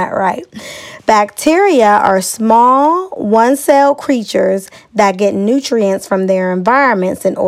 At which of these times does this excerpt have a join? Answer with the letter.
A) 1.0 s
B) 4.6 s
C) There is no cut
A